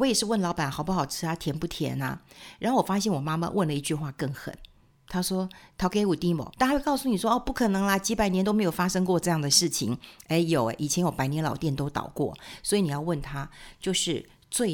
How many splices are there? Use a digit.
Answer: 1